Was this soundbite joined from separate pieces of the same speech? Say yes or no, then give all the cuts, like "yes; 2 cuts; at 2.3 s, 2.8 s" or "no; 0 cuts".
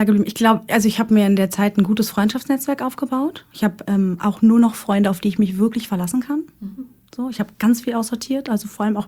no; 0 cuts